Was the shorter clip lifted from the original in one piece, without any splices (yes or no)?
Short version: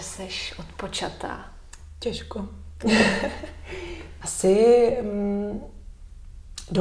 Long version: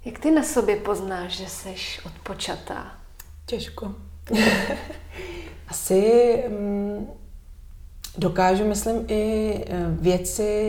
yes